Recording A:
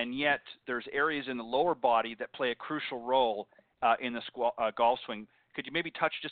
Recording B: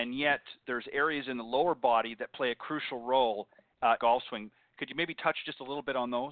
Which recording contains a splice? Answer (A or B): B